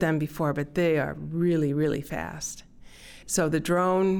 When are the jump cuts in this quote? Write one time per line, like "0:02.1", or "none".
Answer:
0:03.2

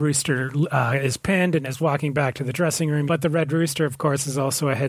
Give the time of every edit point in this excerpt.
0:03.1

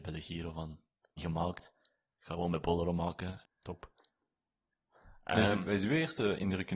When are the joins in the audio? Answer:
0:01.2
0:03.4

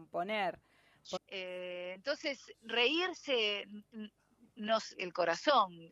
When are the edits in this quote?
0:01.2
0:02.5
0:04.9

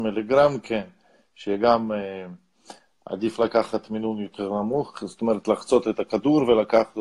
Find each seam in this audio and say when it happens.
none

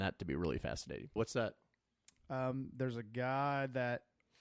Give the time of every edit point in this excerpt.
0:01.2

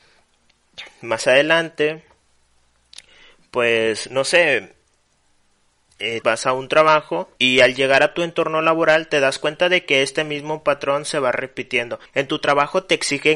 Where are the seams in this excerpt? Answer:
0:06.2
0:07.4
0:12.1

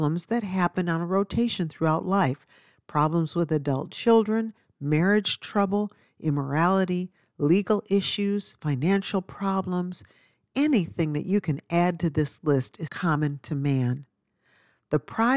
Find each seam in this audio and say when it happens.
0:12.9

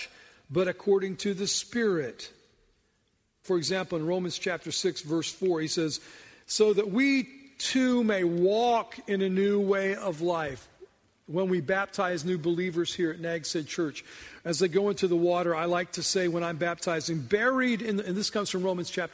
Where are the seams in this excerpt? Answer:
0:03.4

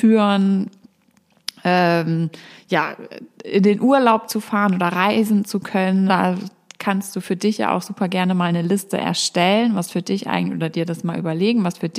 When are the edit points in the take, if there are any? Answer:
0:06.1

